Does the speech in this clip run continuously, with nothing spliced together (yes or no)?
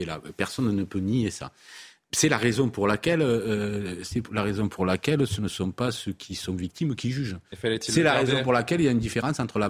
yes